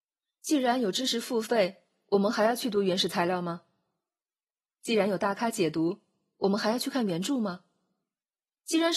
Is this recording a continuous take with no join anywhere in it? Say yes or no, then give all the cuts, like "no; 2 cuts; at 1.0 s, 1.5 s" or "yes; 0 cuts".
yes; 0 cuts